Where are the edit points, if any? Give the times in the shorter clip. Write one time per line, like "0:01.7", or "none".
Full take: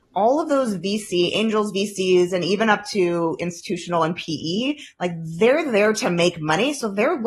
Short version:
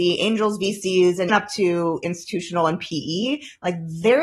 0:01.3